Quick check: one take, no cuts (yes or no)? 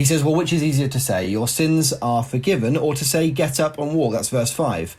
yes